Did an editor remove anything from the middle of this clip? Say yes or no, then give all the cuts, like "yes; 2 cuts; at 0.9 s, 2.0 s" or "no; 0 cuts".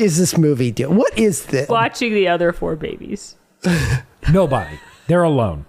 yes; 1 cut; at 1.7 s